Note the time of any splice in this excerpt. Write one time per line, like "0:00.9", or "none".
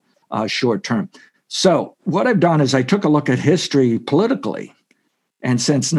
0:02.0